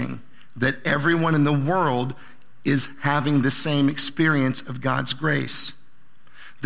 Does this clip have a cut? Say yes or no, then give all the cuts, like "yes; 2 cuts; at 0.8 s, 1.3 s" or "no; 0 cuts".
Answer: no; 0 cuts